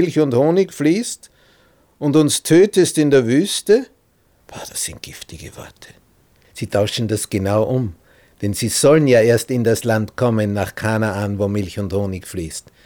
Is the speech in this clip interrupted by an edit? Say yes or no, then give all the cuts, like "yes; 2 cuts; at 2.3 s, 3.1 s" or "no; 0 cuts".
yes; 2 cuts; at 4.4 s, 6.4 s